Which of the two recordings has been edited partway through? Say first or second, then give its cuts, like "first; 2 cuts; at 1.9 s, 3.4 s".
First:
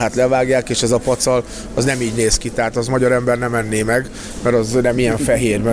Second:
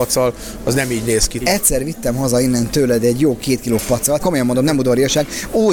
second; 2 cuts; at 1.4 s, 4.2 s